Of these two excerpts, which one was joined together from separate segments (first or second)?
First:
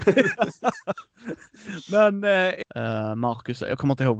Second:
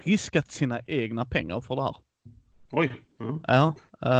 first